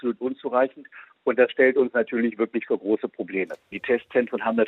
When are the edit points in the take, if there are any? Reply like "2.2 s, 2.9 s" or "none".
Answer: 3.7 s